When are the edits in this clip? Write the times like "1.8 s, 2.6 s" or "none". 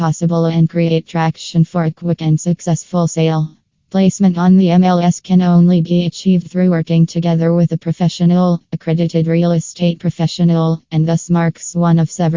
3.9 s